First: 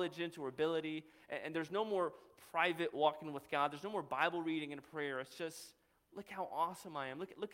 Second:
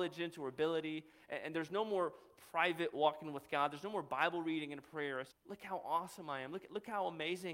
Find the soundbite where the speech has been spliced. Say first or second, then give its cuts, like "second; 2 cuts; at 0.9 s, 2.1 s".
second; 1 cut; at 5.3 s